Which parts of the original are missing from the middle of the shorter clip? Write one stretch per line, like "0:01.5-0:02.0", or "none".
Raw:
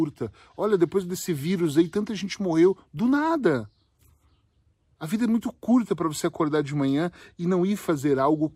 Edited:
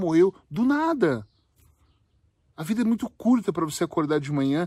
none